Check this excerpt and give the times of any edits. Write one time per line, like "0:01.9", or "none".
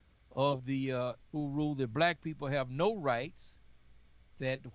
0:01.2